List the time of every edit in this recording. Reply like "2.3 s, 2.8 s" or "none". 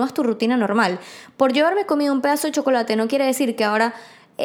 none